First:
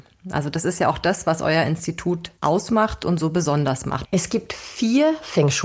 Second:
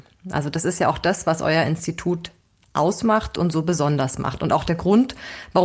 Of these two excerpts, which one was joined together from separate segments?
first; 2 cuts; at 2.4 s, 4.1 s

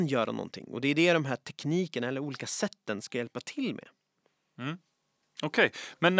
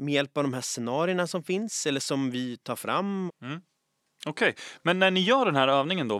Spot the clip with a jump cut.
second; 1 cut; at 3.3 s

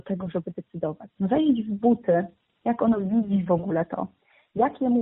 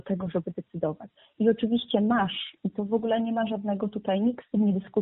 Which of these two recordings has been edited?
first; 1 cut; at 1.2 s

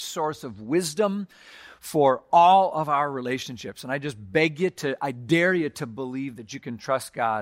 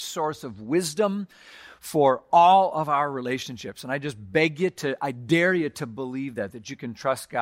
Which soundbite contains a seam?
first; 1 cut; at 6.4 s

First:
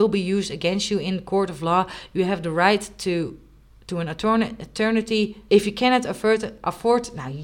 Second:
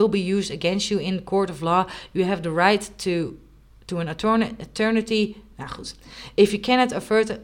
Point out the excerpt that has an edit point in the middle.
first; 1 cut; at 5.5 s

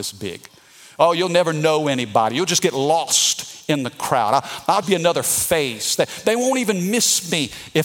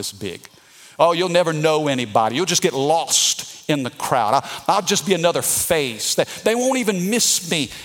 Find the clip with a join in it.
first; 1 cut; at 4.8 s

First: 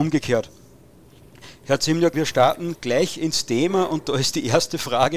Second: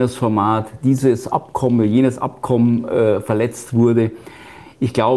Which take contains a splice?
first; 1 cut; at 2.1 s

